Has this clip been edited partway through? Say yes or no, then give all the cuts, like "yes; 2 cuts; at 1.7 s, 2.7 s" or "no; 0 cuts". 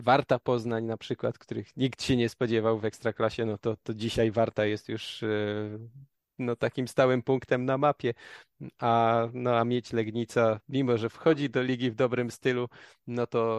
no; 0 cuts